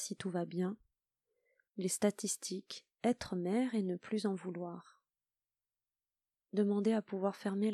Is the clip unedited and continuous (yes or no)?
no